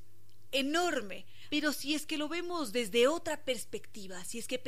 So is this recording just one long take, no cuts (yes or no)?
no